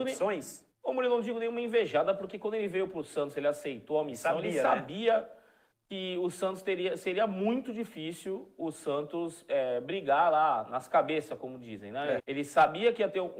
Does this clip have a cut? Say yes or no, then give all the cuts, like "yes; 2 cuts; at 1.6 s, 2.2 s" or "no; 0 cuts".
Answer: yes; 1 cut; at 12.2 s